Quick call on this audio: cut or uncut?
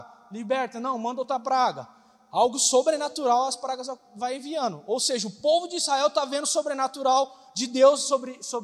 uncut